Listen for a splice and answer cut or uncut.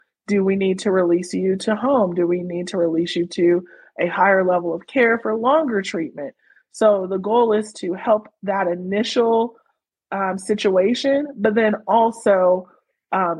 uncut